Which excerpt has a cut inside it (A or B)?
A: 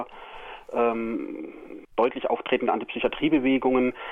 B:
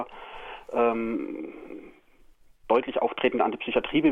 A